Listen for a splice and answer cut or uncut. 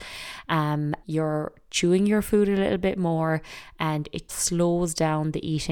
cut